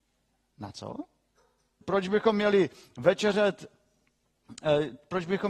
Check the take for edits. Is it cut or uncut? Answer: cut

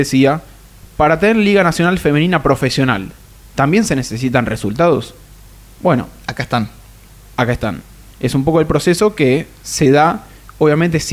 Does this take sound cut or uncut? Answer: uncut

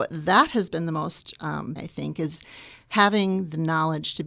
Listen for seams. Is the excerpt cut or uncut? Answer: cut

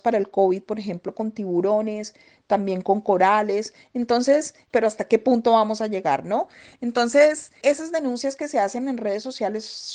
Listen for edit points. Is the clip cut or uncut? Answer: cut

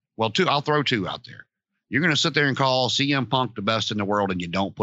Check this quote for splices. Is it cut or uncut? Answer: uncut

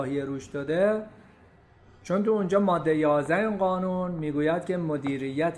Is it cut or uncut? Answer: uncut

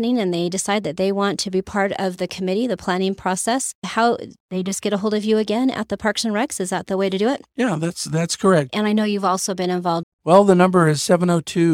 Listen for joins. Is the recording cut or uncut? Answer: cut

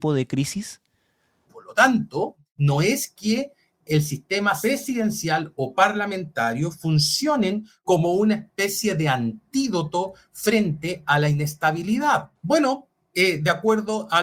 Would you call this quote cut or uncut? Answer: cut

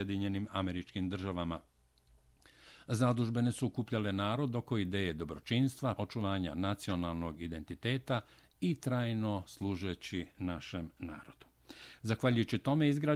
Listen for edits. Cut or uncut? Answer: cut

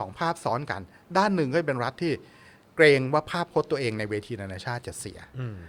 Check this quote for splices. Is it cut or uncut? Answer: uncut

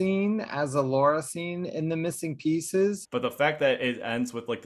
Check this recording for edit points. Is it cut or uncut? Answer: cut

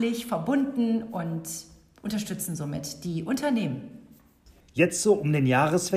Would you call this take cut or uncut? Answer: cut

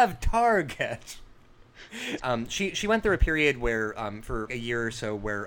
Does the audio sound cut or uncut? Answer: cut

